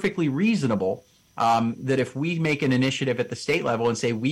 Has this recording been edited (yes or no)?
no